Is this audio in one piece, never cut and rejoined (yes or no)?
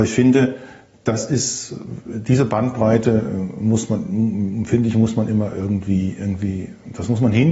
yes